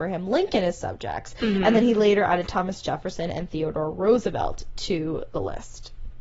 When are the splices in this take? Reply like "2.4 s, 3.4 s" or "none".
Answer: none